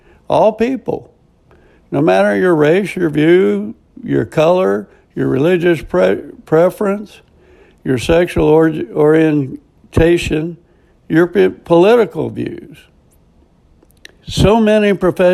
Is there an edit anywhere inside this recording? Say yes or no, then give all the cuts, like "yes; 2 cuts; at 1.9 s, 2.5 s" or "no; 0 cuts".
yes; 1 cut; at 14.2 s